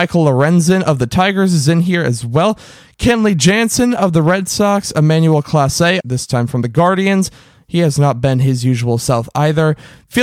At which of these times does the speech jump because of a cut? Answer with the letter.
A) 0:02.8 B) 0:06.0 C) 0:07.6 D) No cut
B